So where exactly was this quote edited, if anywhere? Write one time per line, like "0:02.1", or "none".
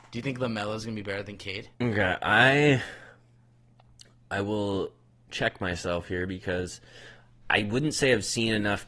0:01.7
0:07.4